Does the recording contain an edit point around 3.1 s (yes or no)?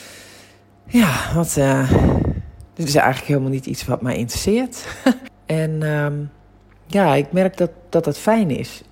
no